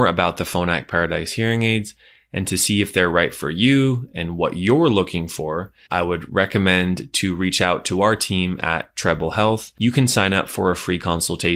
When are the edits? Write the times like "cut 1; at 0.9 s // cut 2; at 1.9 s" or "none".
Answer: cut 1; at 5.9 s